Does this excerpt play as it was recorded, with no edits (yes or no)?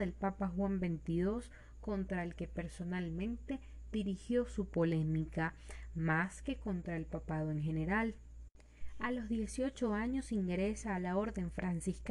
yes